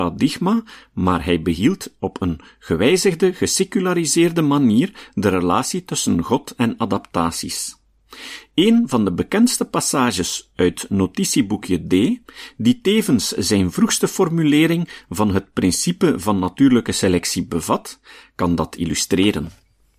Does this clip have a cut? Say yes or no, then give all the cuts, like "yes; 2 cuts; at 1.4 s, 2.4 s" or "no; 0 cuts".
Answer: no; 0 cuts